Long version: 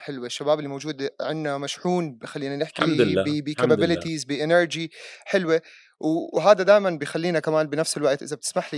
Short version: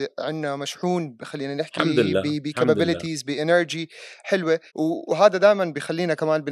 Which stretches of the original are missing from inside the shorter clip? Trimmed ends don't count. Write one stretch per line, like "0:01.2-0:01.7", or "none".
0:05.7-0:05.9